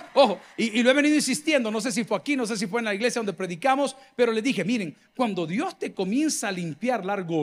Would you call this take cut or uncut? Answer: uncut